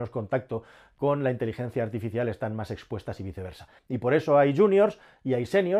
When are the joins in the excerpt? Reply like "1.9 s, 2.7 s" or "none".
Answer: 3.8 s